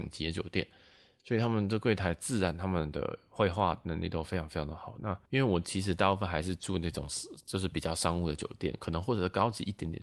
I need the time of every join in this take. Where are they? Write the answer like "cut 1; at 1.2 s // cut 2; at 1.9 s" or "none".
cut 1; at 5.3 s